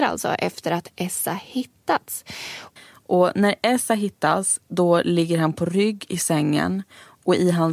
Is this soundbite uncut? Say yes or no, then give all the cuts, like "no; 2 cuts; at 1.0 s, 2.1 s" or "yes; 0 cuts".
no; 1 cut; at 2.8 s